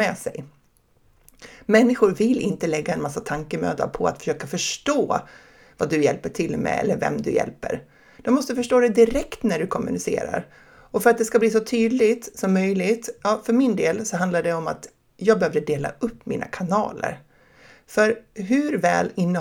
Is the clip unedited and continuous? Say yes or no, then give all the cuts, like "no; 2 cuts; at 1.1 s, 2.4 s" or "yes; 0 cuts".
yes; 0 cuts